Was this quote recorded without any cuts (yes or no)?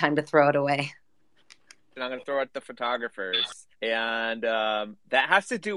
no